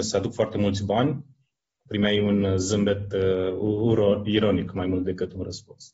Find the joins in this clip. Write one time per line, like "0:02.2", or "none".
0:01.9